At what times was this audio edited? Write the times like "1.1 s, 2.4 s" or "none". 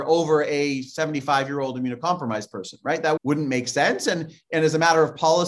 3.2 s